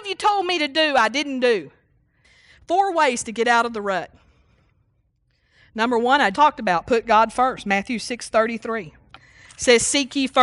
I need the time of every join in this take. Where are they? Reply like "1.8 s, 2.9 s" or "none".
6.3 s